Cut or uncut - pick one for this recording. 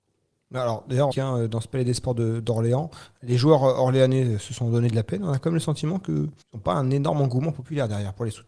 cut